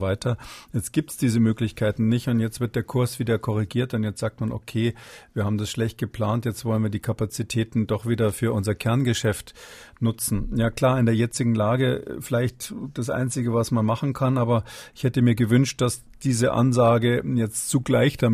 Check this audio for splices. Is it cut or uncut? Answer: uncut